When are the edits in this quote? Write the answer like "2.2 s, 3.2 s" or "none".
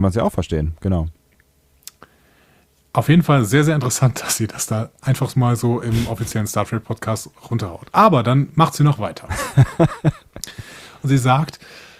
none